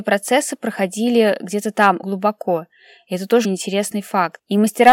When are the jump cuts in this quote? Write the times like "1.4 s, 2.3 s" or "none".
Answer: 2.0 s, 3.4 s